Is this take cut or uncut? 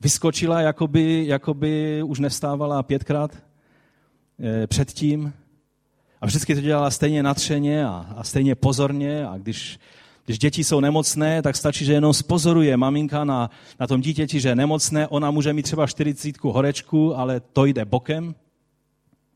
uncut